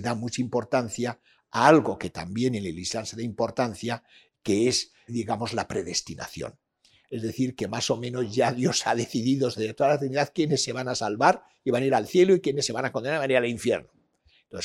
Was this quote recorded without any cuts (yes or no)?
no